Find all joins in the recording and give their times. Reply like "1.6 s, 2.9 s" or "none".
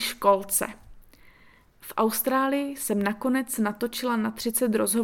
1.6 s